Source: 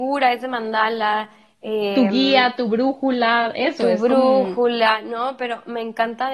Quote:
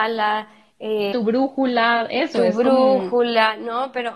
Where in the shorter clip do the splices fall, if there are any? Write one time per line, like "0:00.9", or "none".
0:01.1